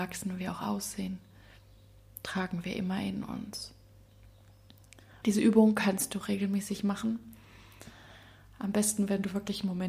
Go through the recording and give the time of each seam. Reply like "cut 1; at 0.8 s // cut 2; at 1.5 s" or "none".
cut 1; at 5.2 s